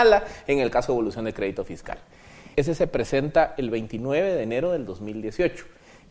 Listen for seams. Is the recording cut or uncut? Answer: cut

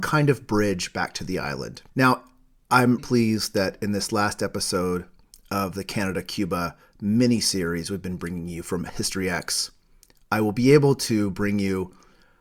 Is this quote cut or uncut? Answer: cut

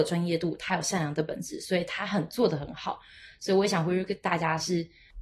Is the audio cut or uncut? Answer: uncut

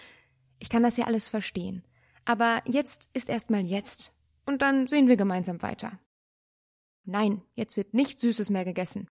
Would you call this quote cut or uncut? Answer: cut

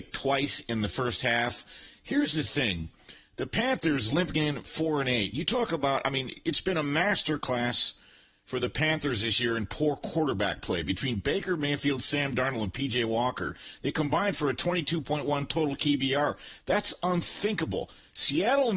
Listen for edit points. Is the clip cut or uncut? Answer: uncut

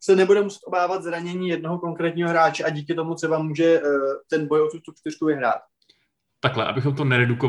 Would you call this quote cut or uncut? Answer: uncut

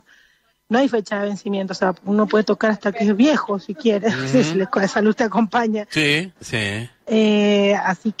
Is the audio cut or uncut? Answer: cut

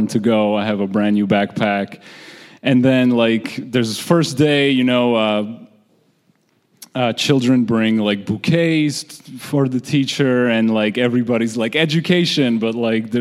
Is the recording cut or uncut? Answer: uncut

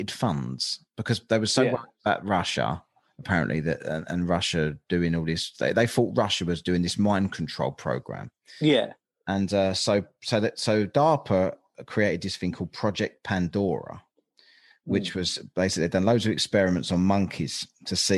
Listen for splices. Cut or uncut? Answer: uncut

